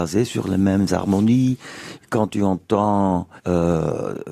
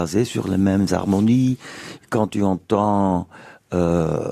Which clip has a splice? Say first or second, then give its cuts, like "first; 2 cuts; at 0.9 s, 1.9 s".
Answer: first; 1 cut; at 3.4 s